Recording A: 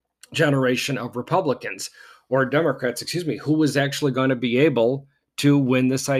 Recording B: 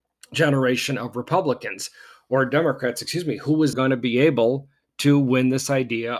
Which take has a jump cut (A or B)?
B